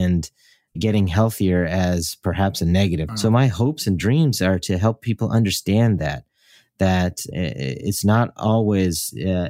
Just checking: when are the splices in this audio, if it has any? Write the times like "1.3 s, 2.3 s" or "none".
3.1 s, 7.3 s